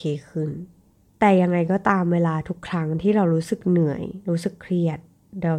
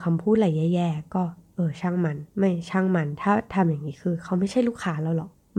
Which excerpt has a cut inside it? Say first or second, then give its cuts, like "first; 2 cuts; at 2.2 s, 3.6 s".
second; 1 cut; at 2.3 s